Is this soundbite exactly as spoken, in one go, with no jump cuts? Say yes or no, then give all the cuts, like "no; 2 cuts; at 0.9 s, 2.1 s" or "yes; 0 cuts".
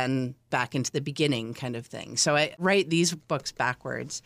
yes; 0 cuts